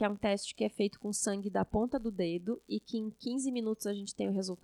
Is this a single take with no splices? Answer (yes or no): yes